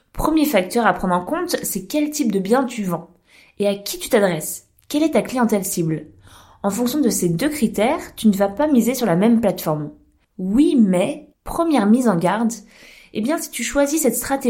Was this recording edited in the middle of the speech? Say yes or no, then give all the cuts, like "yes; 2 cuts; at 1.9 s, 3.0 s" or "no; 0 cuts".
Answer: yes; 2 cuts; at 10.2 s, 11.3 s